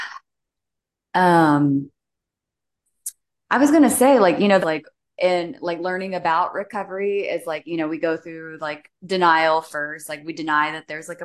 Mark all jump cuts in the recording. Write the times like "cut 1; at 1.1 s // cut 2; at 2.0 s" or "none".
cut 1; at 4.6 s